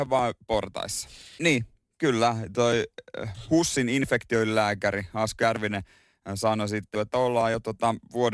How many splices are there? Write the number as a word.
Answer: two